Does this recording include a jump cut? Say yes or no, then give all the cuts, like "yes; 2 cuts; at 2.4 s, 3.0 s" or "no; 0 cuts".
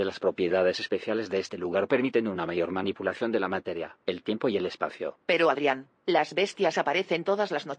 no; 0 cuts